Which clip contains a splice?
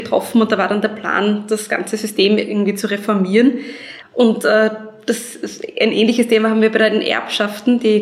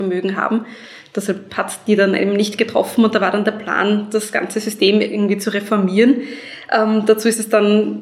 first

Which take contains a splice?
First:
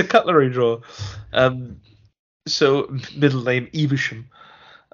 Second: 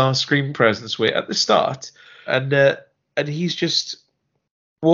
second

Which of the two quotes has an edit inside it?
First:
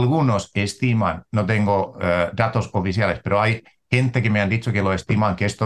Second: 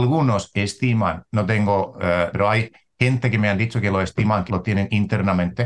second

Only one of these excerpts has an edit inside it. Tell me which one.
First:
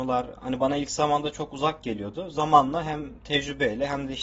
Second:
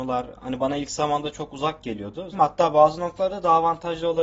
second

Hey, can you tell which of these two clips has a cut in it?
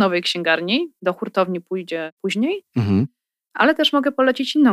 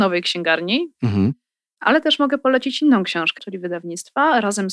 second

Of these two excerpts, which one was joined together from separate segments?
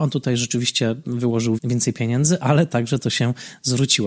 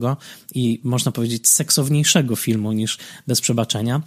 first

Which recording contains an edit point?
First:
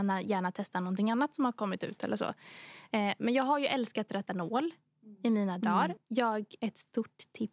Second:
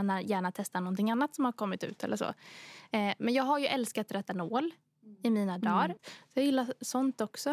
second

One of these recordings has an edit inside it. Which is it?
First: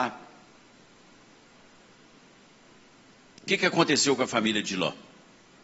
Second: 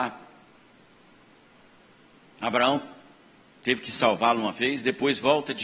second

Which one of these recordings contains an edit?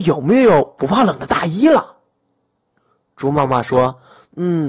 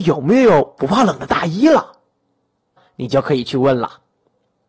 second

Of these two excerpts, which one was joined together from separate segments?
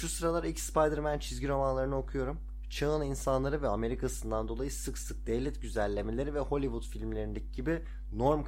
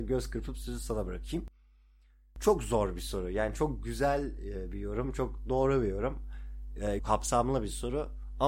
second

